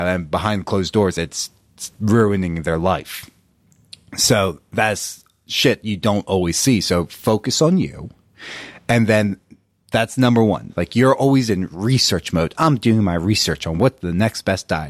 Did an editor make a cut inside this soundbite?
yes; 1 cut; at 10.7 s

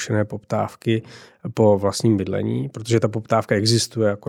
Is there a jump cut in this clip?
no; 0 cuts

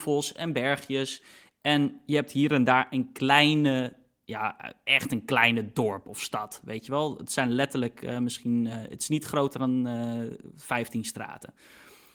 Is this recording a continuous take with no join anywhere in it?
yes; 0 cuts

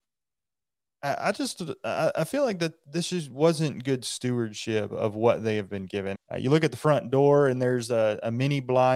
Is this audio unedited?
no; 1 cut; at 6.1 s

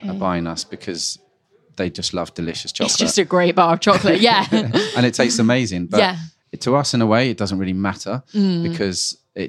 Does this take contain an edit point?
no; 0 cuts

